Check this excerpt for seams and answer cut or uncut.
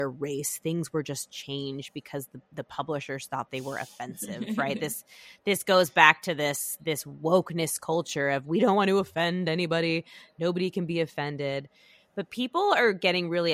uncut